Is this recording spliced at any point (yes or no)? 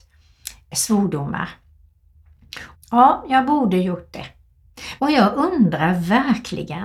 yes